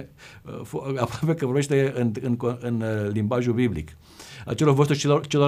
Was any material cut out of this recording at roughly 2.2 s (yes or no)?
no